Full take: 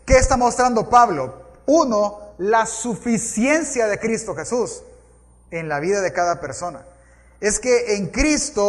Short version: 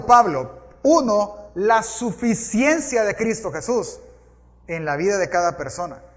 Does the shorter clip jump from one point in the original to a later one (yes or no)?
no